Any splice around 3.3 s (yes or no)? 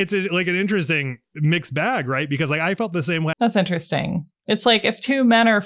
yes